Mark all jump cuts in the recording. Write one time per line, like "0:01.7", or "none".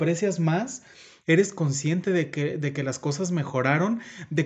none